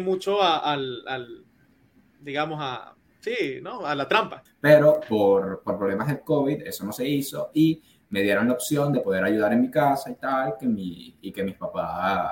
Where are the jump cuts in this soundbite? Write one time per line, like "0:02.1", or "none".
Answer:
0:04.5